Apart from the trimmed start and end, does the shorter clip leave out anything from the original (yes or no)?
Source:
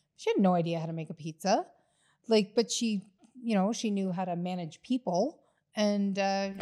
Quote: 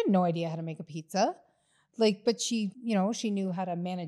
yes